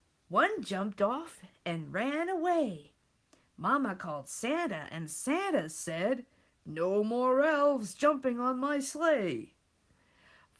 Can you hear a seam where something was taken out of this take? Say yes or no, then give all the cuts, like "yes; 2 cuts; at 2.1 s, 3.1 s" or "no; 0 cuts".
no; 0 cuts